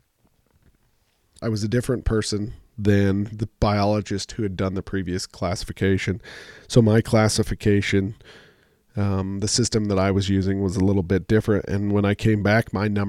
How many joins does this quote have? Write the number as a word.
one